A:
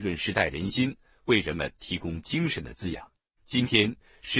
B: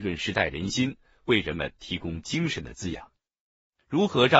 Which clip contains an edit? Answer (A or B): A